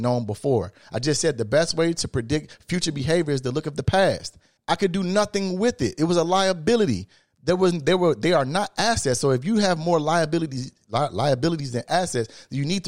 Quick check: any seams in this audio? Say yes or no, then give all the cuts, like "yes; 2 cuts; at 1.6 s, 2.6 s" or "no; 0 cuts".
yes; 1 cut; at 4.6 s